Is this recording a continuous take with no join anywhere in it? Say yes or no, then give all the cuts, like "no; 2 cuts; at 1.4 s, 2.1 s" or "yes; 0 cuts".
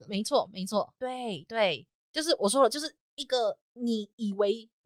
no; 1 cut; at 1.0 s